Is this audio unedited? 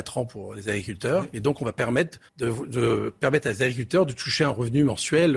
no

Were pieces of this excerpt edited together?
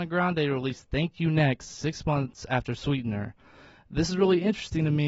no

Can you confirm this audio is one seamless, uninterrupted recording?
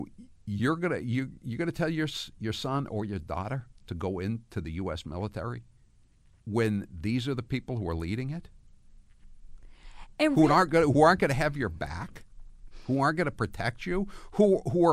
yes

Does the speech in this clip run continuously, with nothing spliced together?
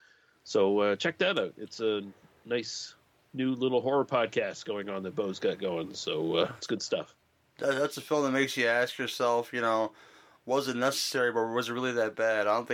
yes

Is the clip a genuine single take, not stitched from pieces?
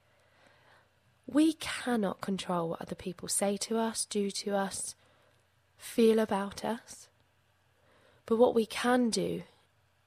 yes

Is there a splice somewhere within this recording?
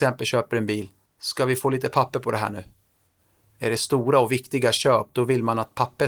yes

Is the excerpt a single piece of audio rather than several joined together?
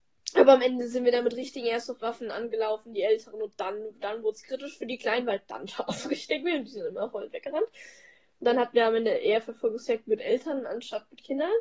yes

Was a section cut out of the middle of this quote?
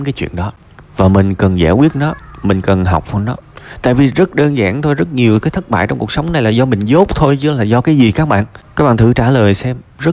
yes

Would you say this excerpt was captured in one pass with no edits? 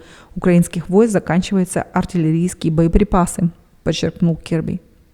yes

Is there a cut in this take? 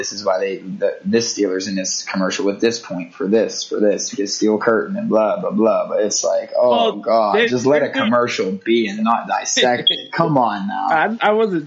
no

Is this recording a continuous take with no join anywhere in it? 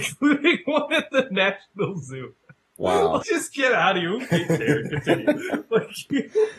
no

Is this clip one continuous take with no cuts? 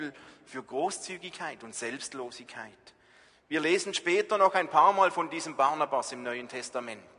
yes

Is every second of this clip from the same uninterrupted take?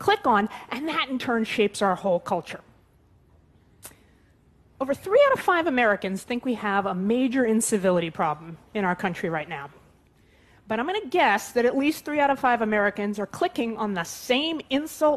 yes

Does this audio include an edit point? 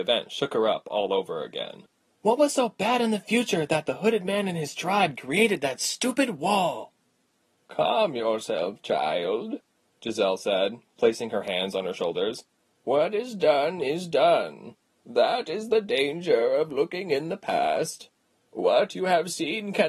no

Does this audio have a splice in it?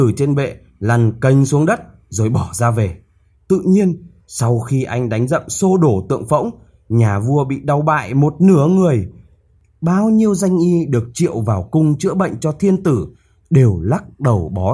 yes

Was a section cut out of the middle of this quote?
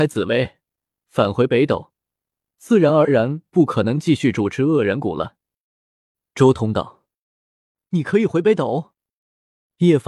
no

